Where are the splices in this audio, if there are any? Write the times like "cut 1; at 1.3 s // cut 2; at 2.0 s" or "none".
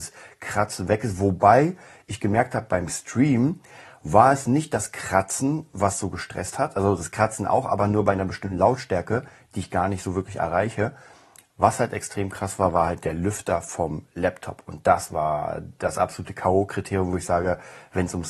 none